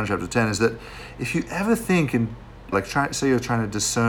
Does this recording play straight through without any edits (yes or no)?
no